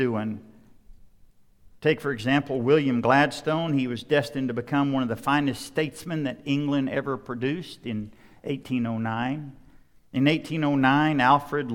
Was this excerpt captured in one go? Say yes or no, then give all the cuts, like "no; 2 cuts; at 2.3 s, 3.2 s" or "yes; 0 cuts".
yes; 0 cuts